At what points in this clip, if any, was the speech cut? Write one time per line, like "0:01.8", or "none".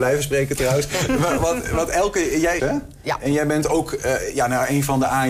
0:02.6